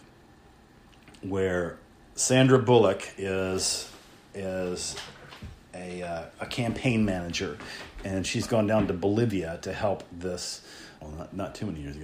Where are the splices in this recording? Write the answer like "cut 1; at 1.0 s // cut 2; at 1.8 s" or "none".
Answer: cut 1; at 11.0 s